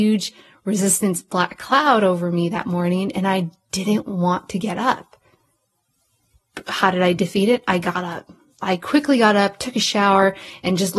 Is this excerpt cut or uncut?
uncut